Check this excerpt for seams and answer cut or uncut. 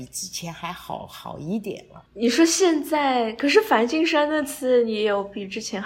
uncut